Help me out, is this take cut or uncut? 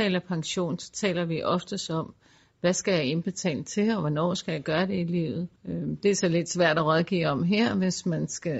cut